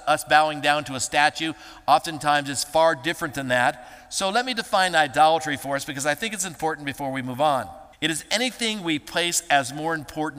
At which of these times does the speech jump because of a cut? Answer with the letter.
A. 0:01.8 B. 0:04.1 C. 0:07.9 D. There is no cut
C